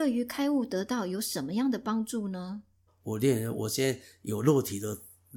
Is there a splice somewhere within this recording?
yes; 1 cut; at 2.9 s

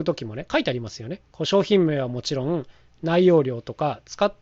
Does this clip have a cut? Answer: no; 0 cuts

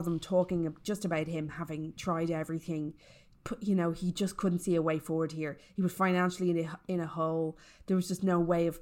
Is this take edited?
no; 0 cuts

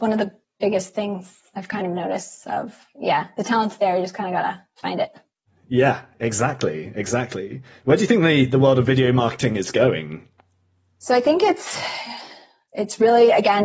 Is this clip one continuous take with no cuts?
yes; 0 cuts

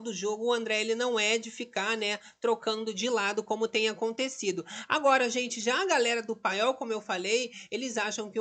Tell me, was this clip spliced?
no; 0 cuts

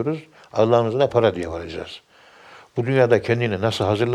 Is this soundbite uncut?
no; 1 cut; at 1.1 s

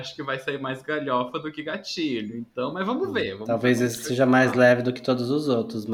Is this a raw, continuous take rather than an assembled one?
yes; 0 cuts

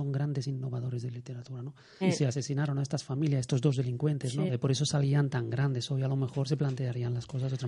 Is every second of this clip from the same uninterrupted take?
no; 2 cuts; at 2.0 s, 4.5 s

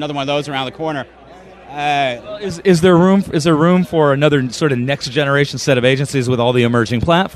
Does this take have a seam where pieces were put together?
no; 0 cuts

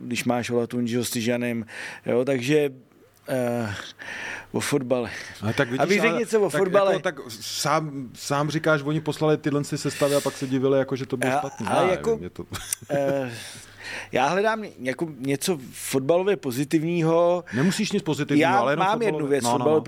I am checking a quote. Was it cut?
no; 0 cuts

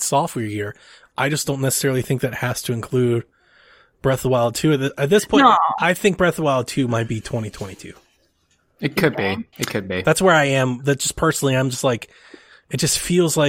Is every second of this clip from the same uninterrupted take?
no; 1 cut; at 9.5 s

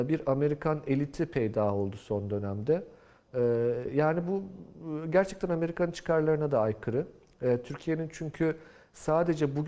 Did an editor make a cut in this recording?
no; 0 cuts

